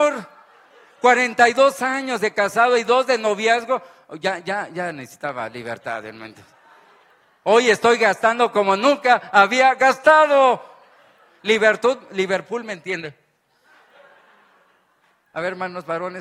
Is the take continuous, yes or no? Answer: yes